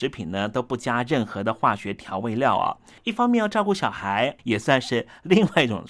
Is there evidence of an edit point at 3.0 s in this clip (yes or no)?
yes